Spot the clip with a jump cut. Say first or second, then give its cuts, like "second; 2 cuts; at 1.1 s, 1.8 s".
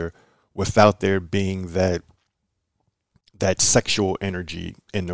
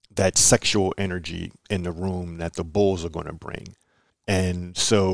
second; 1 cut; at 4.1 s